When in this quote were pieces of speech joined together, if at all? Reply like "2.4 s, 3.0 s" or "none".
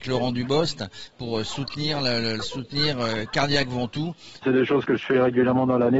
1.1 s, 2.4 s, 4.4 s